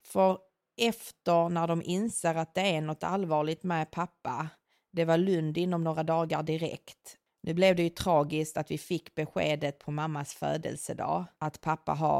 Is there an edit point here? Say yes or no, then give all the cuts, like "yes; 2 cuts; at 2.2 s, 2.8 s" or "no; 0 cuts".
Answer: yes; 1 cut; at 7.3 s